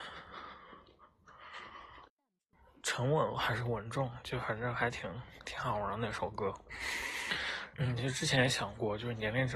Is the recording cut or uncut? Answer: cut